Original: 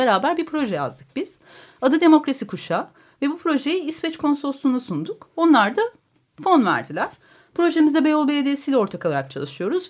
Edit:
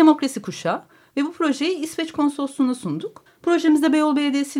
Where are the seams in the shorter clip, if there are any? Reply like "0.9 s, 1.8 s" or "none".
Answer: 3.3 s